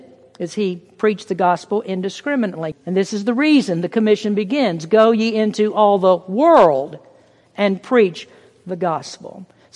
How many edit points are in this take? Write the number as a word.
one